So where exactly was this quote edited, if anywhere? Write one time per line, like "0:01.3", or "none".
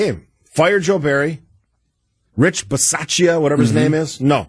none